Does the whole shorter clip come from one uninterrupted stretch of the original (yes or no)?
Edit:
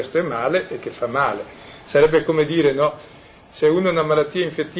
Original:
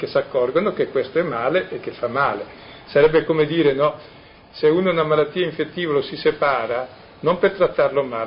yes